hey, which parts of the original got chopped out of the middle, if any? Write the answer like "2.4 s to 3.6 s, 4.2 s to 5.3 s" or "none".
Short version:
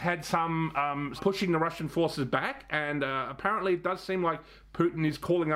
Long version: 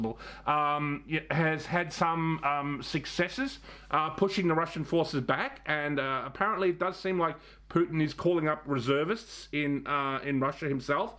2.8 s to 4.1 s